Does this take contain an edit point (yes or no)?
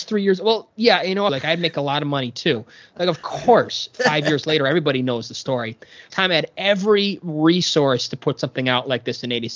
yes